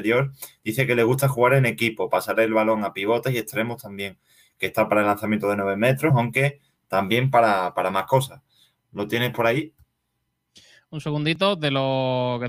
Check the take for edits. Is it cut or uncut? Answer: uncut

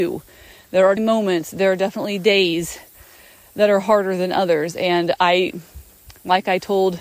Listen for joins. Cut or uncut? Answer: cut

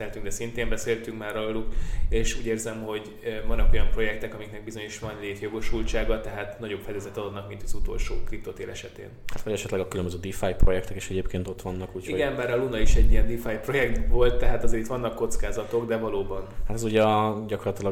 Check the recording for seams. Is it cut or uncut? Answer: uncut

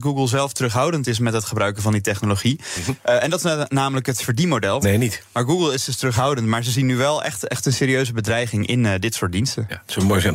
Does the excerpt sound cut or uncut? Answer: cut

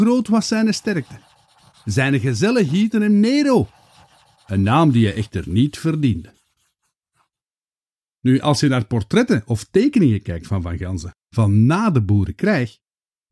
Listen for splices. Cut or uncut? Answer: uncut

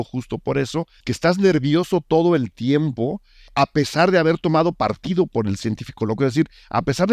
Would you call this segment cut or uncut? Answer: cut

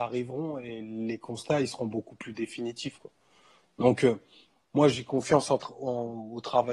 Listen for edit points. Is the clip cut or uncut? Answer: uncut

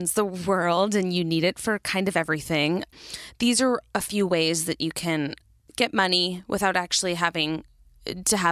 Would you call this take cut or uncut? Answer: uncut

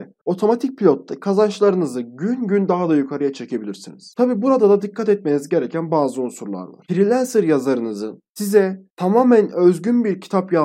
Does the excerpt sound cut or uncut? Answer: uncut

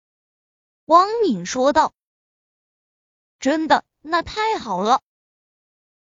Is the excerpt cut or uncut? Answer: uncut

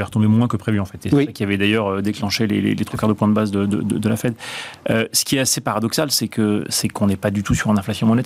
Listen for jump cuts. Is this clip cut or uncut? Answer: uncut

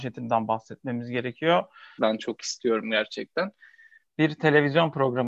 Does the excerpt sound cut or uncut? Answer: cut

